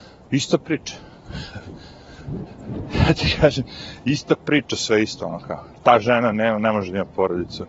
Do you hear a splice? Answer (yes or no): no